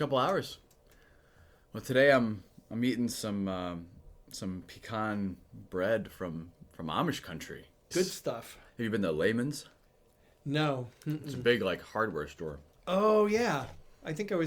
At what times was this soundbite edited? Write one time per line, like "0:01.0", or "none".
0:07.9